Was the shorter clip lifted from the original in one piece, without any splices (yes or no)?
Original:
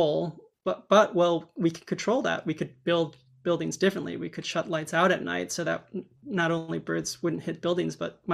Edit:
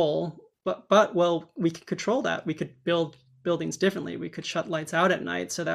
yes